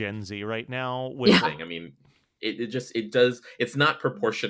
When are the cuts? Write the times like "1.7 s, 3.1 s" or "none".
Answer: 1.4 s